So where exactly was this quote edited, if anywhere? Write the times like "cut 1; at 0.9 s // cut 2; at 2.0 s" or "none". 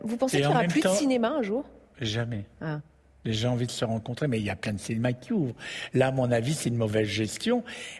none